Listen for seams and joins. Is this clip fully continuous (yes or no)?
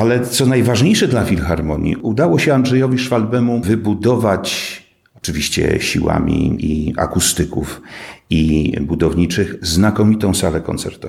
no